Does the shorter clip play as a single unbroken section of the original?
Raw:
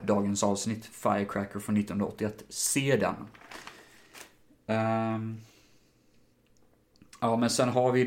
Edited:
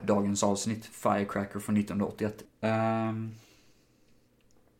no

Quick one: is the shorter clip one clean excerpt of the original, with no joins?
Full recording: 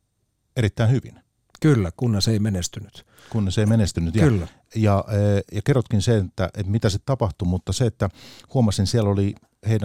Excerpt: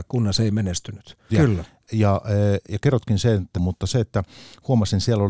no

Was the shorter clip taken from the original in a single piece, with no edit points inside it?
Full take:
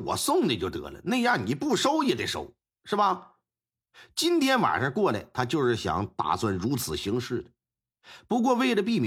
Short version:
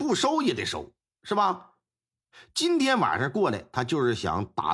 yes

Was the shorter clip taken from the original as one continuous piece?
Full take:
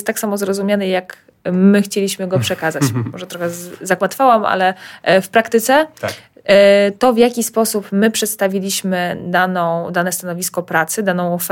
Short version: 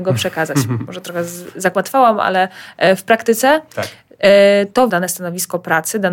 no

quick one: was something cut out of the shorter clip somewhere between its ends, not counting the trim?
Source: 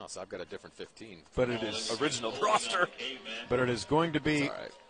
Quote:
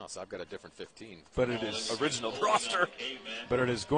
no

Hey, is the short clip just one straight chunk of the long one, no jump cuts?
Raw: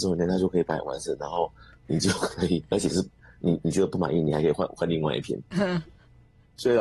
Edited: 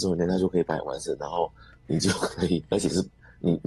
yes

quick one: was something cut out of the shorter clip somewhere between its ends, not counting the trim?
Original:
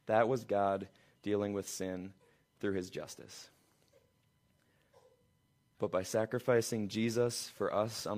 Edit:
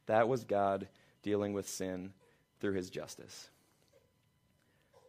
no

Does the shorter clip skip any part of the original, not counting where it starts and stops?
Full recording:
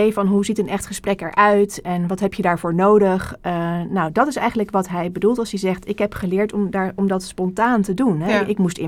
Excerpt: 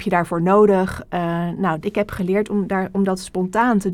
yes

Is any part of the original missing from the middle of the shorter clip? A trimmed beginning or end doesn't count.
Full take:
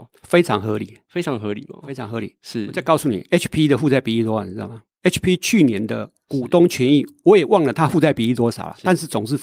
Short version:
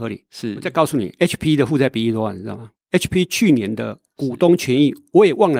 no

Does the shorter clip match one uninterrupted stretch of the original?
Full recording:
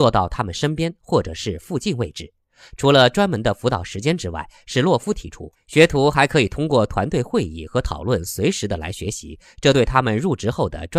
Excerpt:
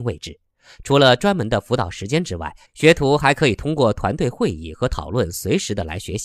no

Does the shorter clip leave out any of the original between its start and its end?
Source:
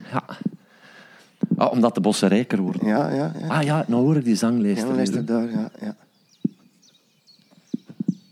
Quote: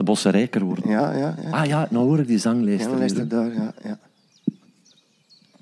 no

